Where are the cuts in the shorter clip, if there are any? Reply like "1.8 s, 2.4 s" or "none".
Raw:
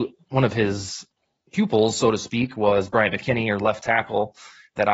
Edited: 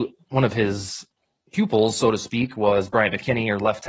none